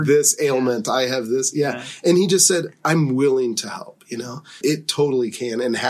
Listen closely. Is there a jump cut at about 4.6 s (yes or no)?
yes